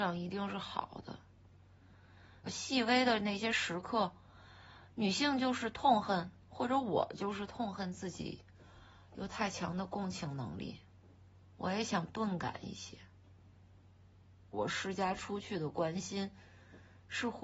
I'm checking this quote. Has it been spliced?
yes; 2 cuts; at 2.5 s, 14.5 s

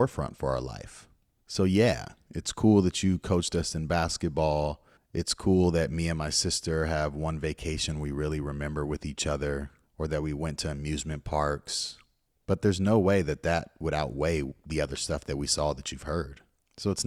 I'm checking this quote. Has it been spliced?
no; 0 cuts

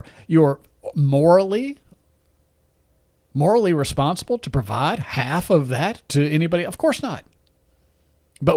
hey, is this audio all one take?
yes; 0 cuts

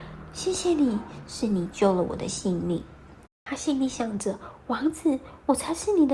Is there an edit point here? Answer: yes; 1 cut; at 3.3 s

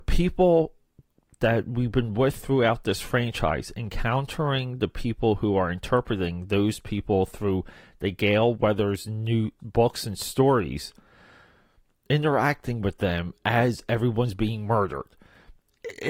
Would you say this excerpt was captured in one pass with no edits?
no; 1 cut; at 9.6 s

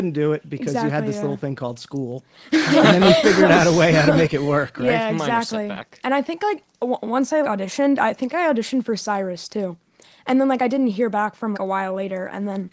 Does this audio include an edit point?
yes; 2 cuts; at 7.4 s, 11.5 s

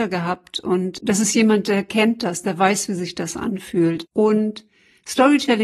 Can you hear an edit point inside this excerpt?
yes; 1 cut; at 4.0 s

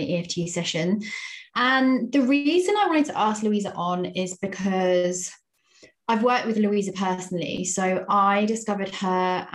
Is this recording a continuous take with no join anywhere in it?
yes; 0 cuts

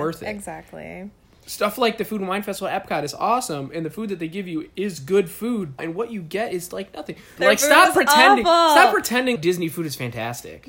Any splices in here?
yes; 3 cuts; at 5.8 s, 7.4 s, 9.4 s

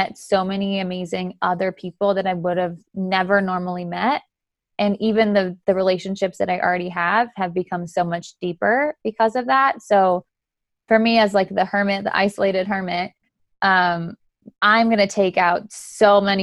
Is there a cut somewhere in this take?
no; 0 cuts

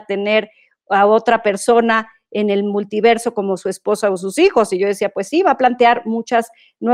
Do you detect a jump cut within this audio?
no; 0 cuts

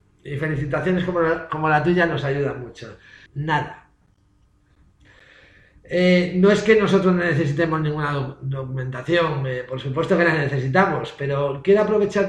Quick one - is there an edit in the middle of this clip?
yes; 1 cut; at 3.3 s

